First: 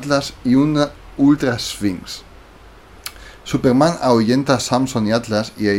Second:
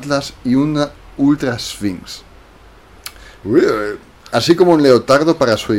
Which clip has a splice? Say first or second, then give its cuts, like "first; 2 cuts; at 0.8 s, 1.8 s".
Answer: second; 1 cut; at 3.4 s